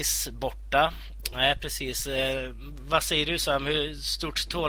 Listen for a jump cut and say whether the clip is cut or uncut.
cut